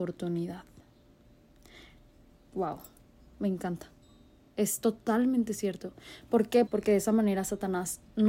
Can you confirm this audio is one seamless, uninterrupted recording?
no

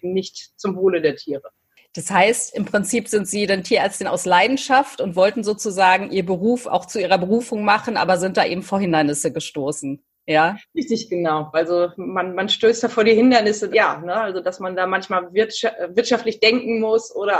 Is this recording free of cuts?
no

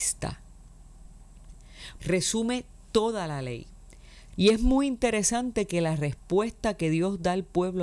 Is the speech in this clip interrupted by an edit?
yes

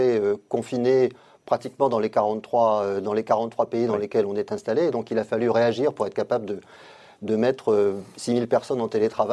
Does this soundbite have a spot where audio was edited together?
no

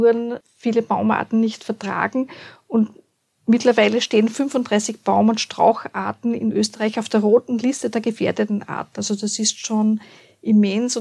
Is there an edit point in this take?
no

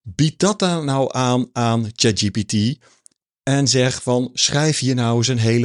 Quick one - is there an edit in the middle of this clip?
no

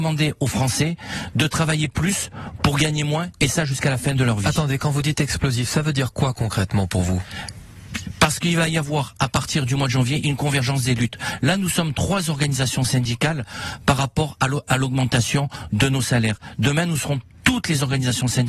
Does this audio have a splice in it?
no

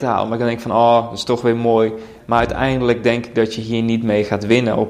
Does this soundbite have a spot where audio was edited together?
yes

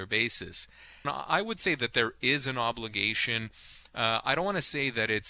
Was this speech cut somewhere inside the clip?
yes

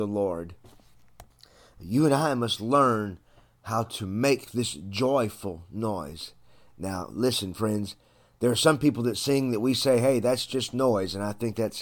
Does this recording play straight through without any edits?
yes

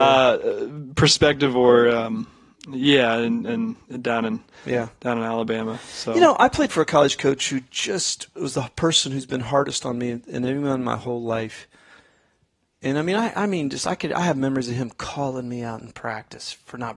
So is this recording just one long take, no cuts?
yes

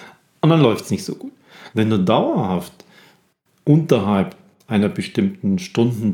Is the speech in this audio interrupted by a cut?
yes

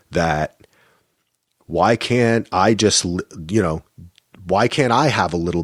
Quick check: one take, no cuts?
yes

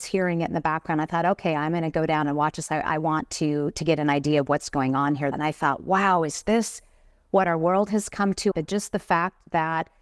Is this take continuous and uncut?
no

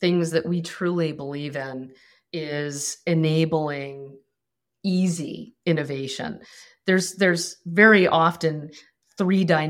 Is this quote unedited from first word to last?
yes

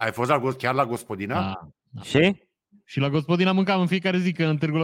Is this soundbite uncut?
no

